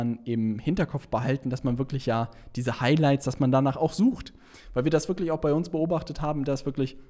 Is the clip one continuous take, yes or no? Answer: yes